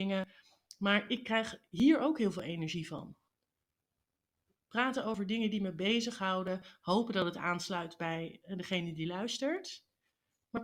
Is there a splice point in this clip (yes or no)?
no